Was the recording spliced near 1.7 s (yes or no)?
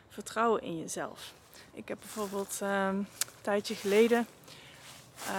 yes